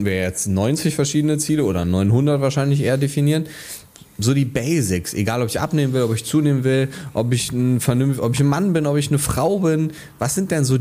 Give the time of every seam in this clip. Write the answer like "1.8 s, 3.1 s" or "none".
none